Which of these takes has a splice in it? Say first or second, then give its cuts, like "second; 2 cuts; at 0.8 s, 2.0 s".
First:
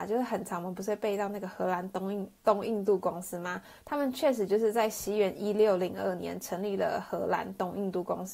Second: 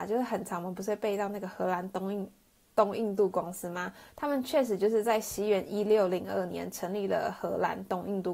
first; 1 cut; at 2.4 s